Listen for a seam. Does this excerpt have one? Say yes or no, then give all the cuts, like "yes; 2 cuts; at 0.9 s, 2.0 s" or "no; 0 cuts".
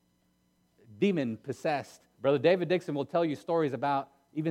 yes; 1 cut; at 2.1 s